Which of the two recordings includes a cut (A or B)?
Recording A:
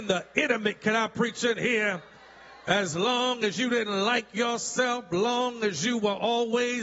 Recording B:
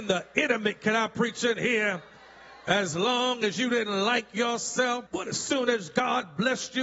B